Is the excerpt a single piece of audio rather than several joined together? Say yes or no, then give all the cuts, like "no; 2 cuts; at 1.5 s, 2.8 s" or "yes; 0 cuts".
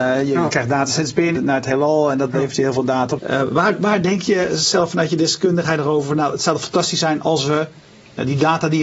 no; 2 cuts; at 1.4 s, 3.2 s